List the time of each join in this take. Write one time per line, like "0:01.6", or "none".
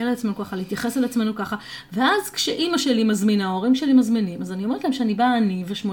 none